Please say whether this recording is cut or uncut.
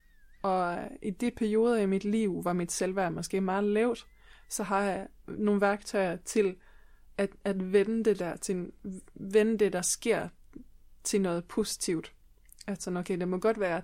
uncut